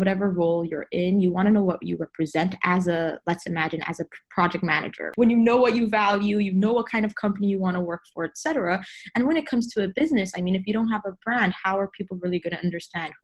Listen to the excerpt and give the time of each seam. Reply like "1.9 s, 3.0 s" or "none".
5.1 s